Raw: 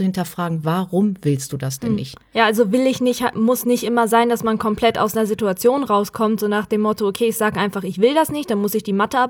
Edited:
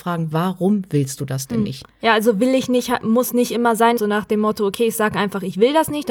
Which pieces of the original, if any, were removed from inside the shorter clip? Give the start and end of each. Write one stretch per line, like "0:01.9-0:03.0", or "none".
0:04.3-0:06.4